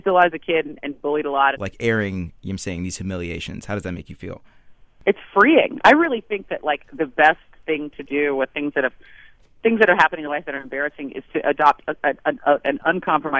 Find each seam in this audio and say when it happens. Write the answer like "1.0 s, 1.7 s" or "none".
1.6 s